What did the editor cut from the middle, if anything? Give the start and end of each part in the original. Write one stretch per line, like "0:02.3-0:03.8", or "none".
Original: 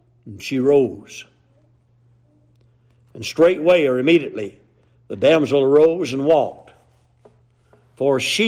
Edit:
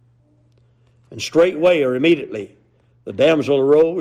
none